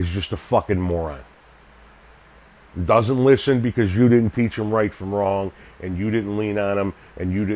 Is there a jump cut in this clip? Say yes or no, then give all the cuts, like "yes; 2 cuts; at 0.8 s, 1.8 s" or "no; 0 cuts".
no; 0 cuts